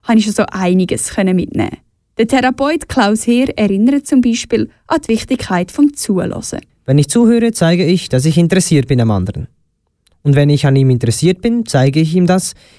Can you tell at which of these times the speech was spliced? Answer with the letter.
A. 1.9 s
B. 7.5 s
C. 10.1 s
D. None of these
D